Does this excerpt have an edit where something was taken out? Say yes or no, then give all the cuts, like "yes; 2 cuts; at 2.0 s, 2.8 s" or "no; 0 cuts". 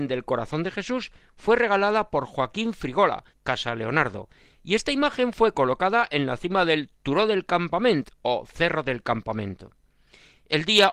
yes; 1 cut; at 3.3 s